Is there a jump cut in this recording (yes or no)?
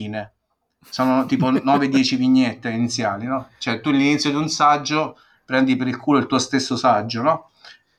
no